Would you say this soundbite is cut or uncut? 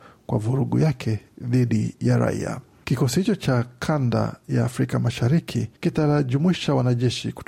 cut